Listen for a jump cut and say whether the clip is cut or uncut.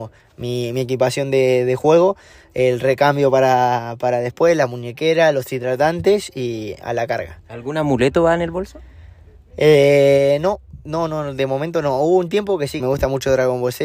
cut